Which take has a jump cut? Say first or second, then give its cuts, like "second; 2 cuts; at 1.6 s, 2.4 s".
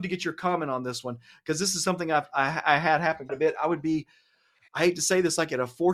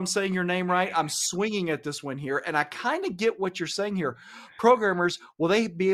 first; 1 cut; at 3.3 s